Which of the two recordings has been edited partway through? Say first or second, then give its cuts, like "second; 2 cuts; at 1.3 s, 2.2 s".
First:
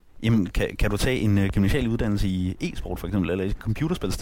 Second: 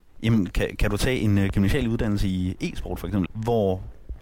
second; 1 cut; at 3.3 s